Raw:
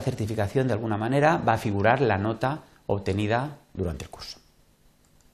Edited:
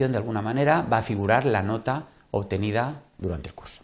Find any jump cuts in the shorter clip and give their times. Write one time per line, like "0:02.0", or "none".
none